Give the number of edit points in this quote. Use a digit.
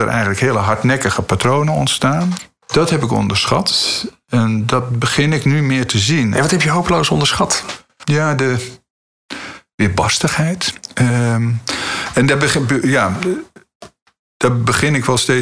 1